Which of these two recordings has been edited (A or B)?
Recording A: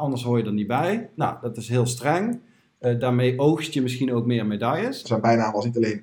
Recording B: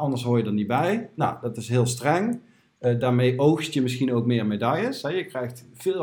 A